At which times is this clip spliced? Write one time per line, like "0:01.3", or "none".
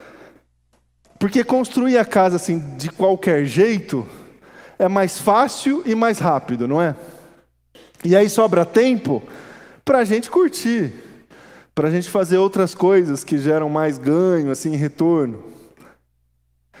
none